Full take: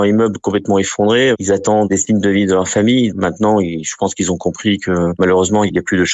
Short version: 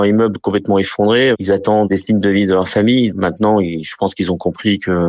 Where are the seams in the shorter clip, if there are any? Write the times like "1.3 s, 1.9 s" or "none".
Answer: none